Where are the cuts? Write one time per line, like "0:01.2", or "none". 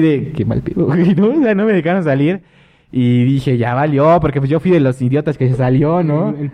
none